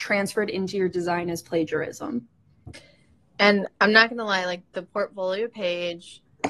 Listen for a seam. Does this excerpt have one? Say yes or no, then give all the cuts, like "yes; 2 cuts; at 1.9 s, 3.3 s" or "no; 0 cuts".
no; 0 cuts